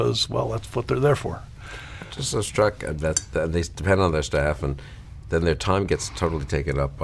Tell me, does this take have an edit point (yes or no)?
no